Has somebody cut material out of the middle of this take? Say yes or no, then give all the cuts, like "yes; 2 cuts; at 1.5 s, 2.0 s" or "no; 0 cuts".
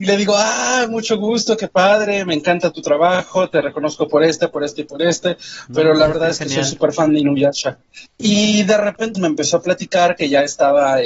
yes; 2 cuts; at 8.1 s, 9.1 s